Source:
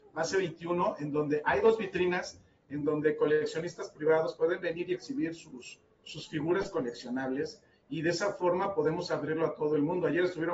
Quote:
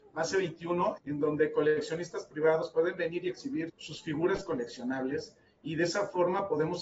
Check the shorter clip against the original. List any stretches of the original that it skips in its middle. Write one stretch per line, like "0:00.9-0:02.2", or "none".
0:01.0-0:02.6
0:05.3-0:05.9